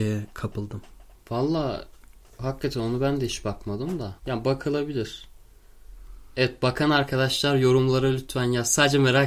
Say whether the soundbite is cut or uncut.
cut